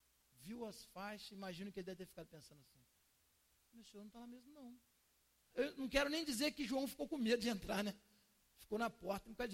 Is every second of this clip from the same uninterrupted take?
no; 1 cut; at 5.5 s

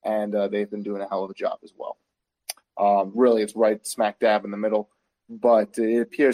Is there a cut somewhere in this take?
yes; 1 cut; at 2.6 s

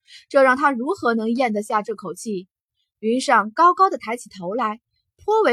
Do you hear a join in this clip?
no; 0 cuts

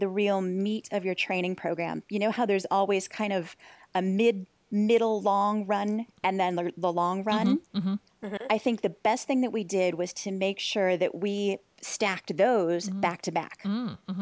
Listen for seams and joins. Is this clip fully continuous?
yes; 0 cuts

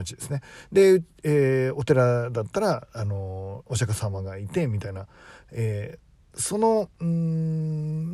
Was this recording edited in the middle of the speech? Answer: yes; 1 cut; at 7.0 s

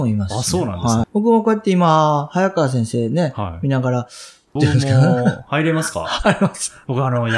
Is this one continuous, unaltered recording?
no; 2 cuts; at 1.0 s, 4.6 s

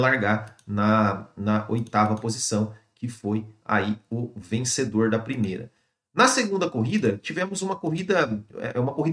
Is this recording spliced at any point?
no; 0 cuts

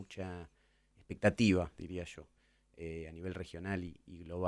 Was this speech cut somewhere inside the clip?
no; 0 cuts

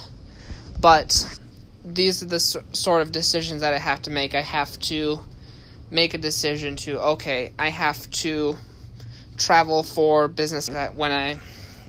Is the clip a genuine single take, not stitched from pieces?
no; 1 cut; at 10.7 s

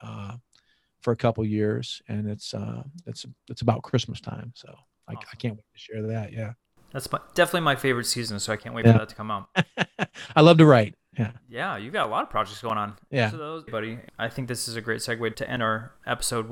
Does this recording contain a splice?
yes; 2 cuts; at 13.7 s, 15.3 s

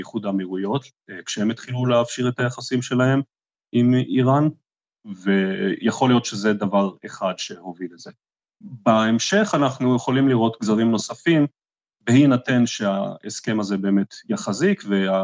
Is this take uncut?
yes; 0 cuts

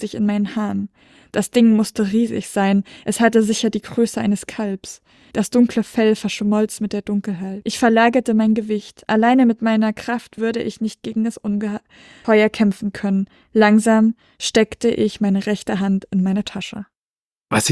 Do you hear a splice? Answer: no; 0 cuts

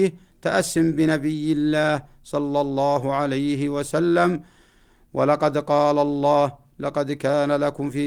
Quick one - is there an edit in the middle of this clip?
no; 0 cuts

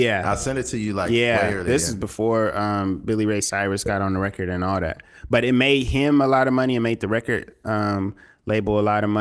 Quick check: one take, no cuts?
yes; 0 cuts

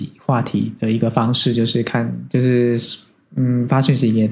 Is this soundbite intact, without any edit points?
yes; 0 cuts

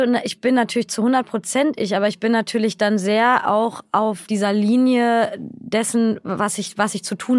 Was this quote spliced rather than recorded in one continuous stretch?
no; 0 cuts

